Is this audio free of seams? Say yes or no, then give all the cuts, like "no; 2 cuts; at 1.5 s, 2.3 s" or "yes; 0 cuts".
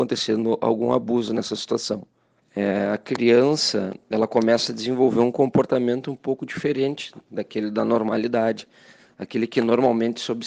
no; 1 cut; at 2.4 s